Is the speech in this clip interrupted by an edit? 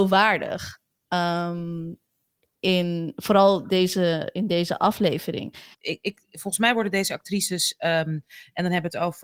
yes; 1 cut; at 5.7 s

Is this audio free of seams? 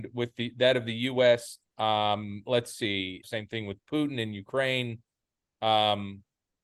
no; 2 cuts; at 1.6 s, 3.2 s

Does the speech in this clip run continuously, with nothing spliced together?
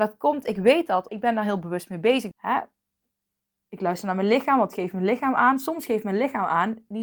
no; 2 cuts; at 1.1 s, 2.3 s

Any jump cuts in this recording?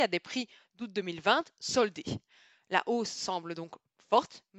no; 0 cuts

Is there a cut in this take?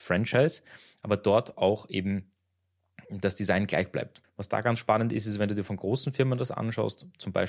yes; 1 cut; at 4.2 s

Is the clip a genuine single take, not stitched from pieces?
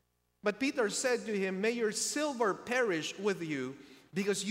yes; 0 cuts

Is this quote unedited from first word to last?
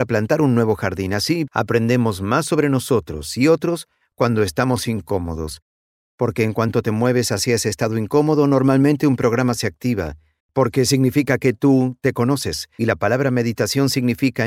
no; 2 cuts; at 1.5 s, 10.4 s

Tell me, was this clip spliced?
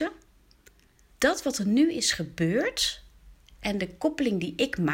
yes; 1 cut; at 1.1 s

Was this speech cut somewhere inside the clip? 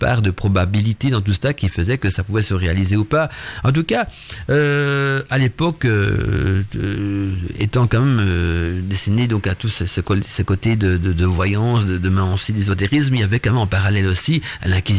no; 0 cuts

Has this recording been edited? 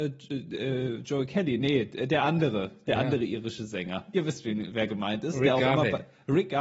no; 0 cuts

